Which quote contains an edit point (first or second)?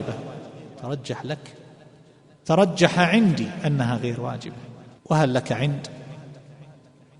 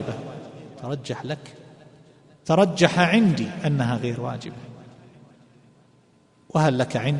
first